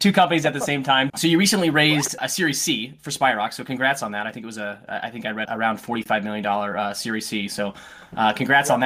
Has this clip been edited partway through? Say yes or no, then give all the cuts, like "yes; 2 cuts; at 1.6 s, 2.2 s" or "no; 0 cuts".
yes; 2 cuts; at 1.1 s, 5.4 s